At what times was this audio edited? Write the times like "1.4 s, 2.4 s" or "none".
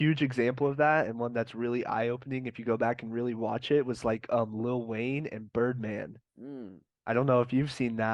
6.3 s